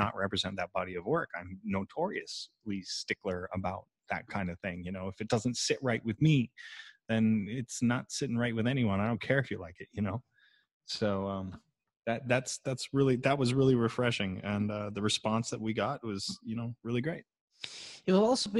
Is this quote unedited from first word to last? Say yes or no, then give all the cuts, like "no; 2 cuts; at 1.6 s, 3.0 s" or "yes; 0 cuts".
yes; 0 cuts